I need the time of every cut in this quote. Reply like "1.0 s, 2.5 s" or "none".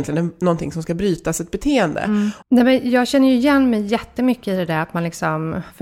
2.4 s